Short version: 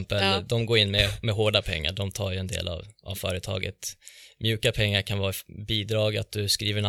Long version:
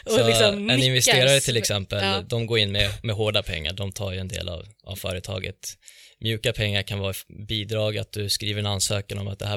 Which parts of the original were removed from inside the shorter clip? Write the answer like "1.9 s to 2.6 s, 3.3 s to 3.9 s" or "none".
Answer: none

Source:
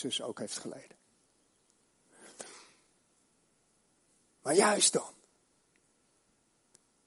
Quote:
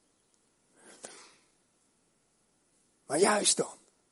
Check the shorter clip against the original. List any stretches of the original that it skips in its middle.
none

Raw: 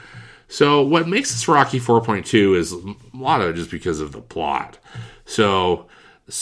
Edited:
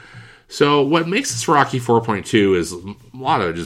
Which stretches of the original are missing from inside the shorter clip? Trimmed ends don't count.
none

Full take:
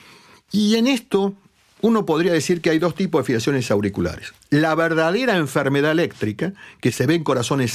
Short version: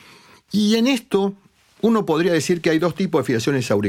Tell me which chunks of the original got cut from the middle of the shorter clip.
none

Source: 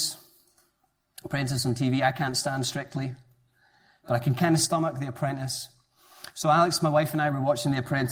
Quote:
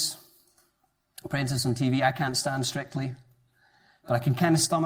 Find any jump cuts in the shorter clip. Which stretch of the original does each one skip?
none

